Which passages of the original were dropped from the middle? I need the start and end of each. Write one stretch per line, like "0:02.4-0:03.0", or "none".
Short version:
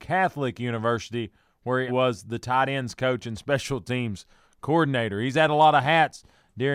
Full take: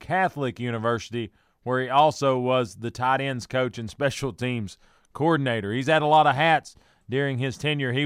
0:01.9-0:02.4